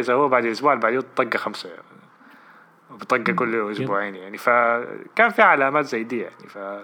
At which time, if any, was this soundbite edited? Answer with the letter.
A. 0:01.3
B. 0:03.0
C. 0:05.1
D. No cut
D